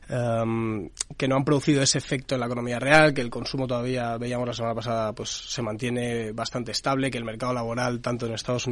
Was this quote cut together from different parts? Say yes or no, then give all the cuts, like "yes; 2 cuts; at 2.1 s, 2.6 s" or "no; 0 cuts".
no; 0 cuts